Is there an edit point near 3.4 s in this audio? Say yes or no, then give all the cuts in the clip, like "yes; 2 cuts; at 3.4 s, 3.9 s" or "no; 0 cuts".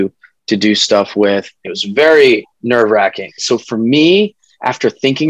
yes; 2 cuts; at 1.6 s, 3.4 s